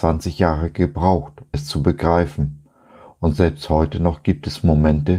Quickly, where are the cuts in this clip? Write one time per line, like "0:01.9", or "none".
0:01.5